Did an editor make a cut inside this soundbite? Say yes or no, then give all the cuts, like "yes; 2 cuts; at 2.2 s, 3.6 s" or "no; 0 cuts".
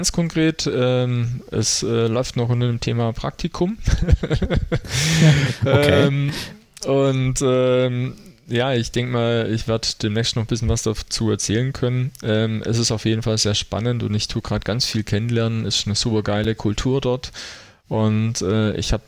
no; 0 cuts